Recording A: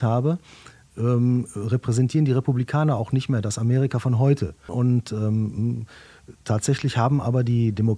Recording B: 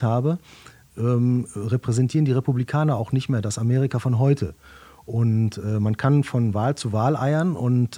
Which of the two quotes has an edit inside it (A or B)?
A